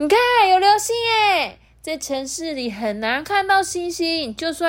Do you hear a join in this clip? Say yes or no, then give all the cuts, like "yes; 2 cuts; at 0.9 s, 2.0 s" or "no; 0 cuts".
no; 0 cuts